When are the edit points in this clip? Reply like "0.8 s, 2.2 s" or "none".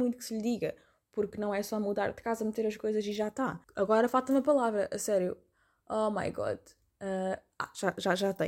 3.6 s